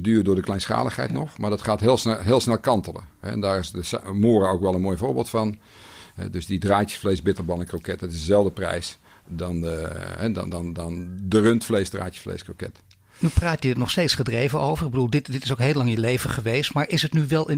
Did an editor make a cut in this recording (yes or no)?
no